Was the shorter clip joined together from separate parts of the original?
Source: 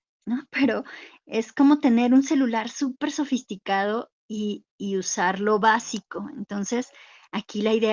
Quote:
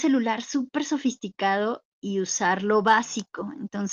yes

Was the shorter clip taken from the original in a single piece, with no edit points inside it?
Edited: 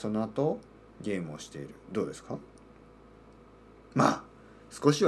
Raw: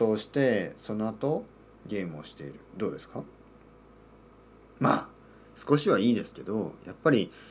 yes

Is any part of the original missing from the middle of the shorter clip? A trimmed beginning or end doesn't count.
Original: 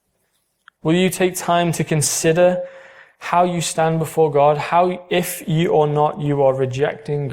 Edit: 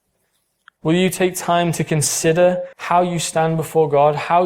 yes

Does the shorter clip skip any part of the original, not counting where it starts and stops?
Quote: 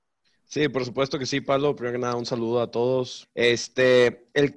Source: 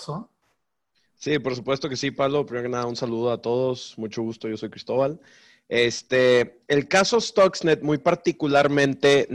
yes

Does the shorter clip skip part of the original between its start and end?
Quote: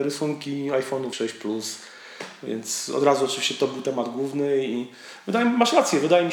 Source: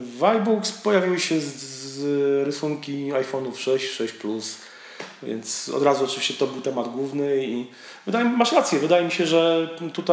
yes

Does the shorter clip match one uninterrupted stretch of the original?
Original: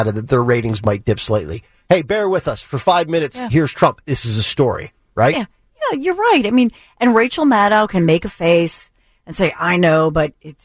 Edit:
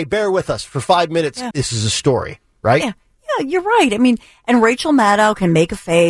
no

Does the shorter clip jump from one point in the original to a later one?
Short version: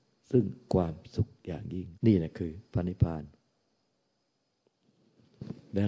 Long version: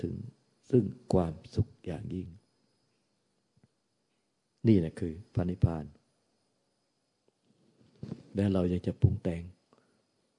yes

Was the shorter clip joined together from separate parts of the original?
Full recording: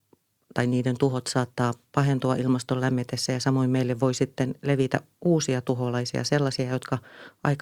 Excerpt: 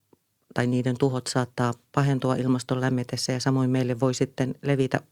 no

